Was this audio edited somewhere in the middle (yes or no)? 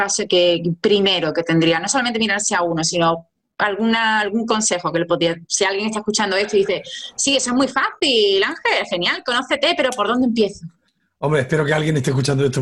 no